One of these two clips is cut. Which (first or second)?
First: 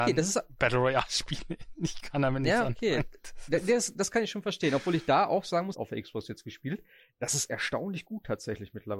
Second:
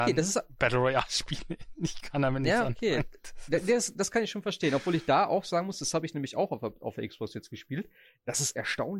first